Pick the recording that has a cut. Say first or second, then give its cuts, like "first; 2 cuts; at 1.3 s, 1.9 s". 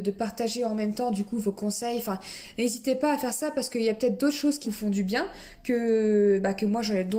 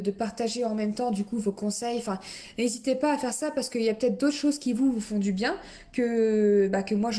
first; 1 cut; at 4.6 s